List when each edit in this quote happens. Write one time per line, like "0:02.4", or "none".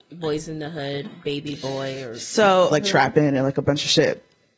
0:01.0
0:02.7